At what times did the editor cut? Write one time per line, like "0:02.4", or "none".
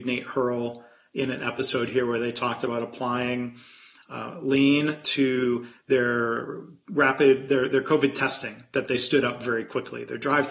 none